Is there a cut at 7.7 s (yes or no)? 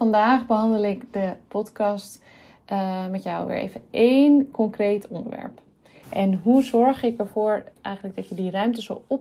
yes